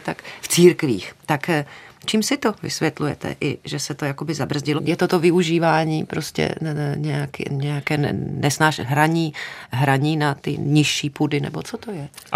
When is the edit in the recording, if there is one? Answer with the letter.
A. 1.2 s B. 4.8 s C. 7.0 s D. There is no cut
B